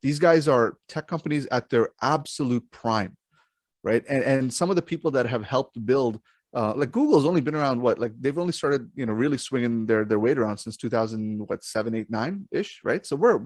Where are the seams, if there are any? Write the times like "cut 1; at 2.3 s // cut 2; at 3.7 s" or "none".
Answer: none